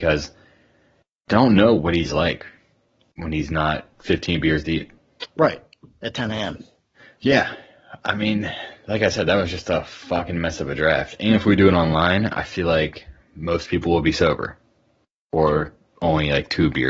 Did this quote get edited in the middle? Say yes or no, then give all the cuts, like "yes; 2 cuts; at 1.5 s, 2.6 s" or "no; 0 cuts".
no; 0 cuts